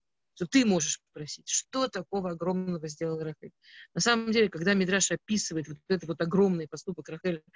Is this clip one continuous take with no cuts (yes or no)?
yes